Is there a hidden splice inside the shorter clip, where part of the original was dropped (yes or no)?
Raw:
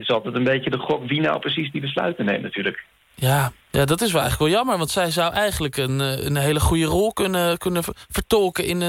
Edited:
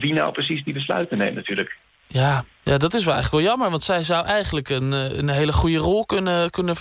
no